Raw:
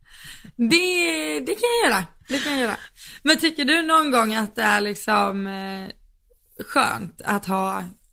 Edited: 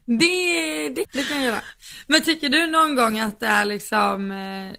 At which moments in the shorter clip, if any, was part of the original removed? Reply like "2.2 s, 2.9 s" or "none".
1.0 s